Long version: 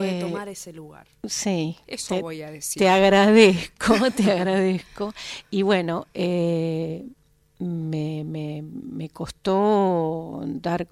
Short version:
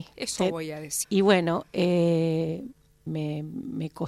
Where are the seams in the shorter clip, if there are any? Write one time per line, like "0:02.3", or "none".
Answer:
0:01.0
0:03.1